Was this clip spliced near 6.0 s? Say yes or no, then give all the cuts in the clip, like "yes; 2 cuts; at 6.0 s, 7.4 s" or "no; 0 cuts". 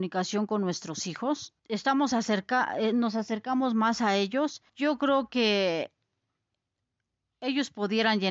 no; 2 cuts; at 1.6 s, 4.7 s